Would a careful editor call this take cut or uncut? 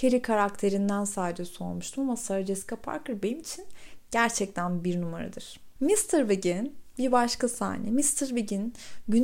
cut